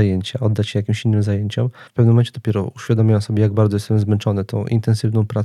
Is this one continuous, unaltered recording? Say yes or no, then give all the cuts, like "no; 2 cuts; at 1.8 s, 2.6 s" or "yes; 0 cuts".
no; 1 cut; at 1.9 s